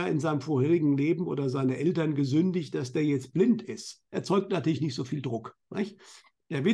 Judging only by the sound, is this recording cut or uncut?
cut